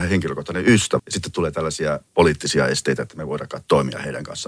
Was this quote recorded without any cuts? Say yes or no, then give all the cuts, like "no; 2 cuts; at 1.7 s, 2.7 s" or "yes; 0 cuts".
no; 1 cut; at 1.0 s